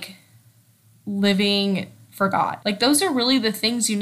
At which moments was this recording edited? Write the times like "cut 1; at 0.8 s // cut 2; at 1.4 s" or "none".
cut 1; at 2.6 s